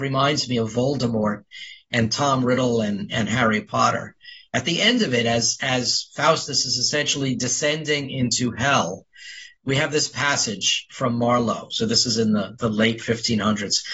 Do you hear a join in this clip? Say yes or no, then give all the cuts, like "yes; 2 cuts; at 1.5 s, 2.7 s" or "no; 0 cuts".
no; 0 cuts